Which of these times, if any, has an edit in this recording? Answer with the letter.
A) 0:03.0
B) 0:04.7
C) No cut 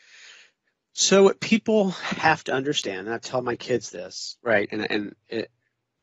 C